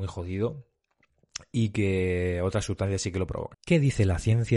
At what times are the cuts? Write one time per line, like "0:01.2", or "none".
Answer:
0:03.5